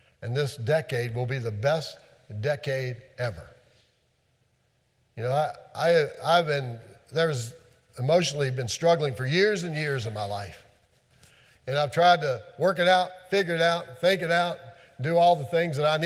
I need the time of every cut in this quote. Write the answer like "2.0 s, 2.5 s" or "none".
none